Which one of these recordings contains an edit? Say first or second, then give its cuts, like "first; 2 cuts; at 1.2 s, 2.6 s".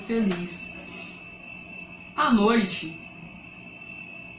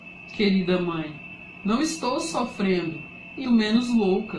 second; 1 cut; at 3.4 s